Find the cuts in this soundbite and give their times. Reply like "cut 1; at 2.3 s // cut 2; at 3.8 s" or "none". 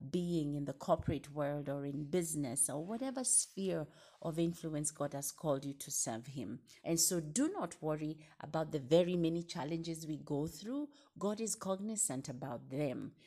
cut 1; at 6.8 s